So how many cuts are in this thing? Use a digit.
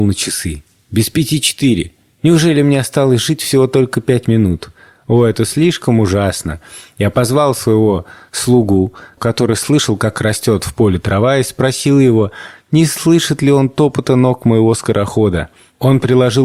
1